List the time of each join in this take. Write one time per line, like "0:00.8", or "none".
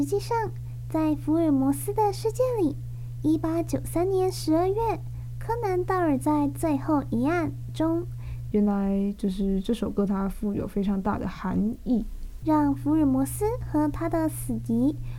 0:08.5
0:12.4

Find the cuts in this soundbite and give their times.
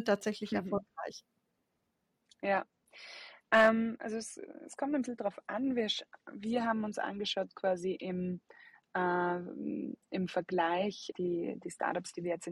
0:11.1

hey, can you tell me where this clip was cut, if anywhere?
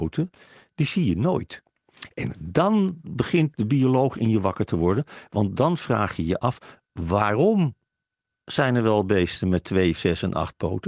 0:10.0

